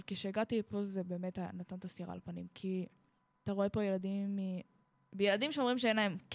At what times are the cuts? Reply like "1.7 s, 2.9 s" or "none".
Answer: none